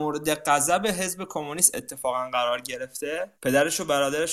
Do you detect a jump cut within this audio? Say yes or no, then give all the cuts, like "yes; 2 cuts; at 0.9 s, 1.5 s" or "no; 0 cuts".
yes; 1 cut; at 3.3 s